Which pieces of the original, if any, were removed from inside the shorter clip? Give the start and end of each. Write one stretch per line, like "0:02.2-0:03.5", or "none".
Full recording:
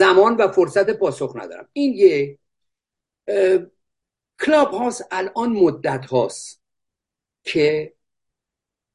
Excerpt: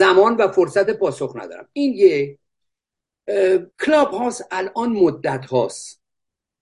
0:03.7-0:04.3